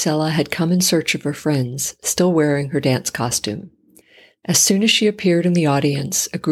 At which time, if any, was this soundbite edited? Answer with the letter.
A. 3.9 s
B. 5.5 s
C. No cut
C